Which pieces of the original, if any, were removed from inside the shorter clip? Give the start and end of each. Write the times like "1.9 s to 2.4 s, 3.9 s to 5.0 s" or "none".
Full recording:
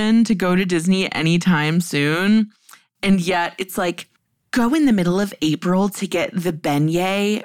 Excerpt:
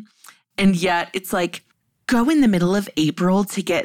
none

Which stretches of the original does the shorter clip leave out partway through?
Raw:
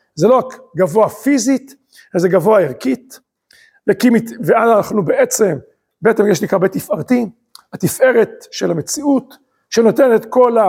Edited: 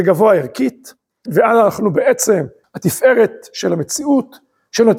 3.5 s to 4.4 s, 5.8 s to 7.6 s

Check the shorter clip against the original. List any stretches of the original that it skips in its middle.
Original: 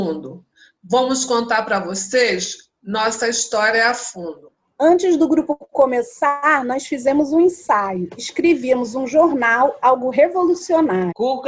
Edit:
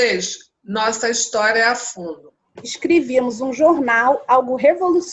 4.7 s to 8.1 s

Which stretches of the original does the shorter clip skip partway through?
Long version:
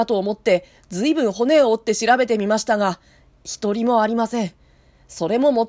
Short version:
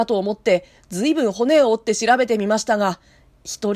none

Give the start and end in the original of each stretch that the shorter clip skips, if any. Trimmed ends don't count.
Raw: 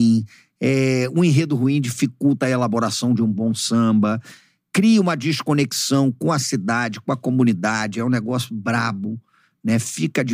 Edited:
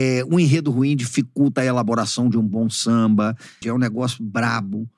4.5 s to 7.9 s

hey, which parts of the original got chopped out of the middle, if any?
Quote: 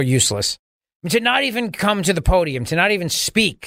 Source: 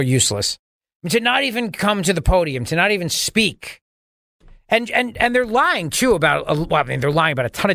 none

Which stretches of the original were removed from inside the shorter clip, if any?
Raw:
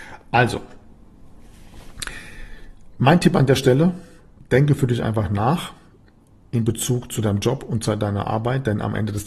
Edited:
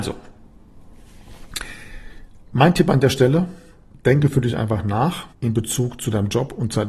5.8 s to 6.4 s

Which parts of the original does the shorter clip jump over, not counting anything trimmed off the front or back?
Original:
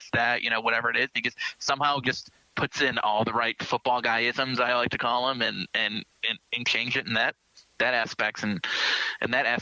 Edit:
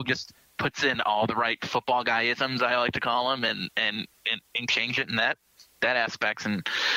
none

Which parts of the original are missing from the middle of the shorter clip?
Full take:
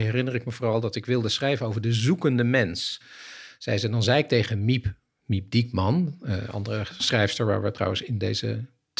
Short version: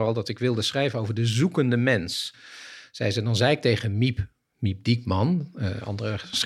none

